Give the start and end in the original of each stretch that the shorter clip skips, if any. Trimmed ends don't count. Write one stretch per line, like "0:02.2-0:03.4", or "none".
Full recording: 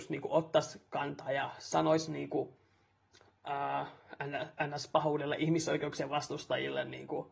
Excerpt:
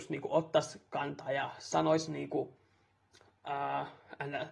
none